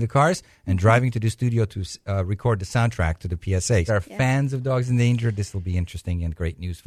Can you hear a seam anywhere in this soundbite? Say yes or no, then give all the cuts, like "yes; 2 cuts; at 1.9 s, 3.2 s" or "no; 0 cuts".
yes; 1 cut; at 3.9 s